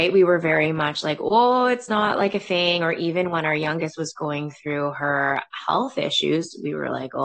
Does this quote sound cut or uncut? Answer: uncut